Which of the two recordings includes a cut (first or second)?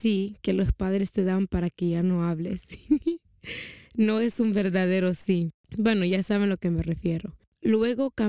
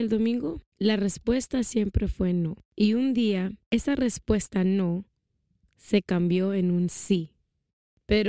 second